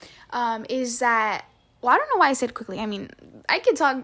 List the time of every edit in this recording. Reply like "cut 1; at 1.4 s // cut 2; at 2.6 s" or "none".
none